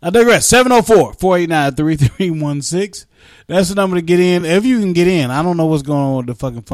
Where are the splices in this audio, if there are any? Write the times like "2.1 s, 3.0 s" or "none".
none